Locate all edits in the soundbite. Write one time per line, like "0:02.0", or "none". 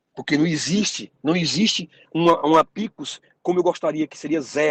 none